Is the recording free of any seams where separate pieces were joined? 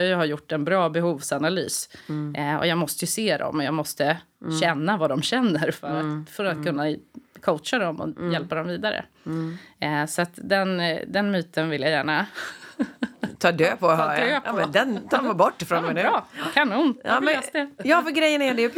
yes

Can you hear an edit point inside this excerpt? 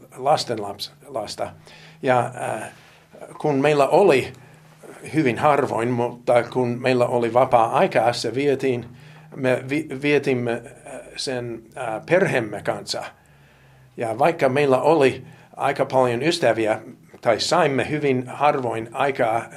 no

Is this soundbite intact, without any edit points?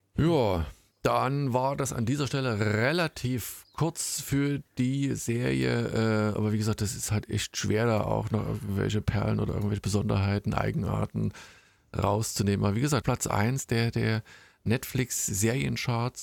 no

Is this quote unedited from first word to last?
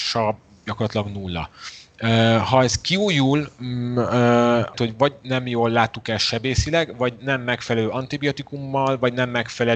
no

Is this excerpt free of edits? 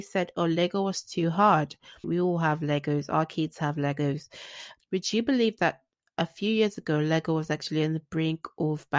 no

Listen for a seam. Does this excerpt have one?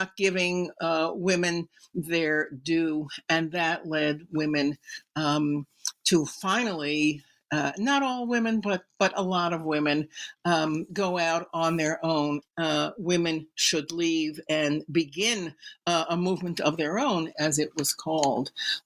yes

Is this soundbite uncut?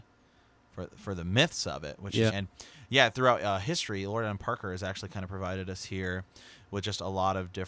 no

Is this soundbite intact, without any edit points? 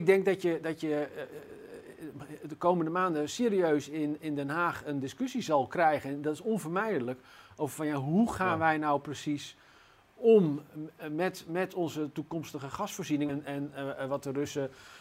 no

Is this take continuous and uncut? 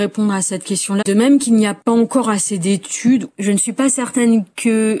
no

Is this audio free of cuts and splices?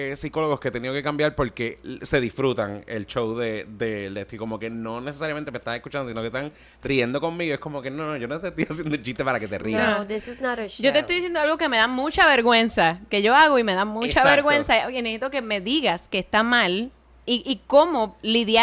yes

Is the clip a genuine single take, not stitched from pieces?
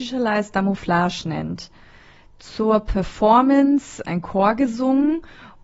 no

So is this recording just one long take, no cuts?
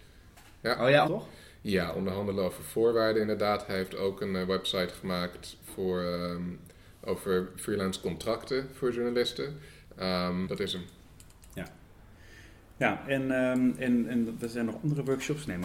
no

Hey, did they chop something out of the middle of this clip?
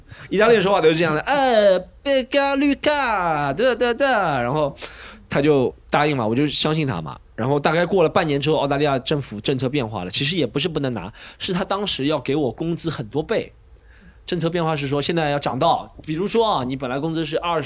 no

